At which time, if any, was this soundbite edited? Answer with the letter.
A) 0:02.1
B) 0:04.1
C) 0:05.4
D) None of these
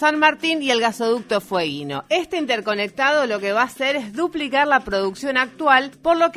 A